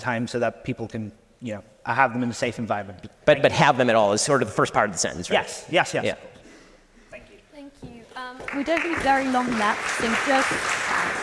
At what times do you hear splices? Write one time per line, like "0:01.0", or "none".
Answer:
none